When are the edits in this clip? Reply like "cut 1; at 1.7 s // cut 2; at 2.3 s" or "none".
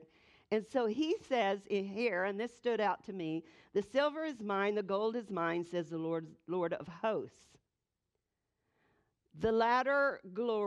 none